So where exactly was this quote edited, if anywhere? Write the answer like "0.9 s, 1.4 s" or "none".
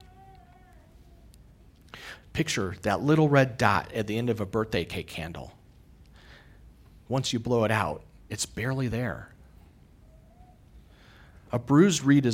2.2 s